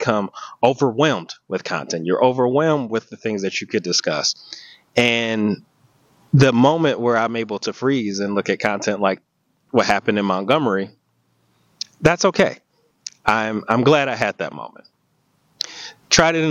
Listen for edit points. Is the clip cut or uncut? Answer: uncut